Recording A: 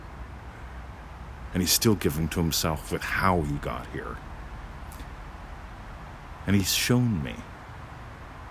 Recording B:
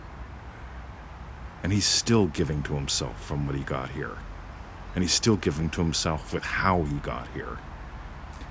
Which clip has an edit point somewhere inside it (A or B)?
A